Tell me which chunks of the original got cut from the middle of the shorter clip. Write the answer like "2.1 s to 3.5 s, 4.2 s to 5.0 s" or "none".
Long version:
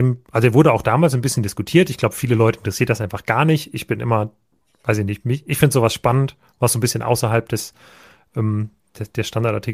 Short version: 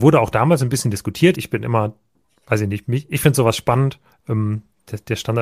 1.9 s to 3.7 s, 6.5 s to 8.2 s